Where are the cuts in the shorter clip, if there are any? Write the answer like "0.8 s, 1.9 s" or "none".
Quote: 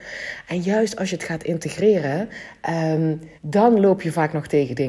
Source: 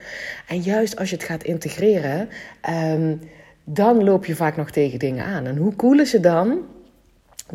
3.4 s